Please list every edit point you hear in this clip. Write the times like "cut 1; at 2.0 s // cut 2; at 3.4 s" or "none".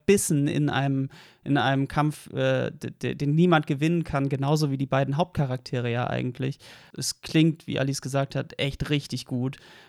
cut 1; at 6.9 s